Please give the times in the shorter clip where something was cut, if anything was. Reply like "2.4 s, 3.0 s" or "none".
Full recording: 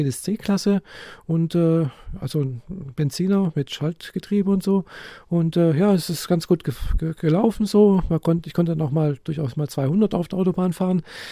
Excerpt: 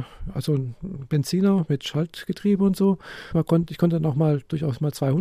3.3 s